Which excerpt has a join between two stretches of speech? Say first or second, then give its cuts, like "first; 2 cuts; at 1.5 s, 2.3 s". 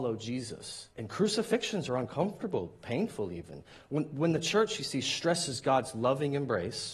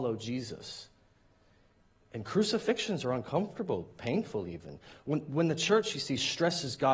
first; 1 cut; at 0.9 s